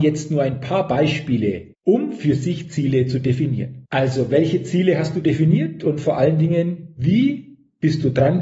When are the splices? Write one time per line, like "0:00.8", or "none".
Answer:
0:01.7
0:03.8